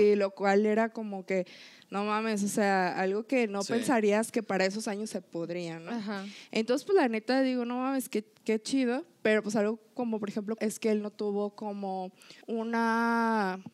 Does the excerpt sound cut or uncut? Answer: cut